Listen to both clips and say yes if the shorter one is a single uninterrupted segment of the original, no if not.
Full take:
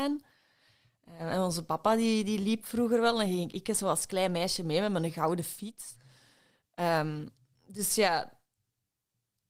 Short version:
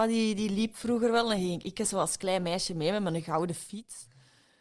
yes